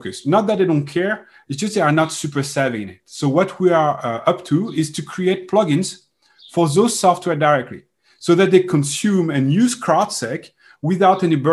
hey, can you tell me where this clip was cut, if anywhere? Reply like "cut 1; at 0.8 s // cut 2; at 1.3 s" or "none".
none